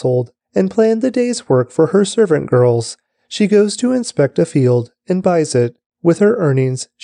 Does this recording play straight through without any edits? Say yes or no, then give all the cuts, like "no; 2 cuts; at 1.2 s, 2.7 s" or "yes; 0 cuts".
yes; 0 cuts